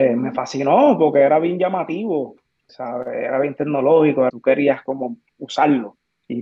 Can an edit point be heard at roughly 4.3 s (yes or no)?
yes